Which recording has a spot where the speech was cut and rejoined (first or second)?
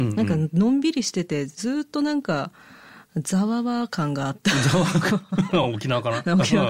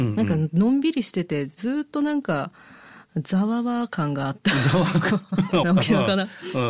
second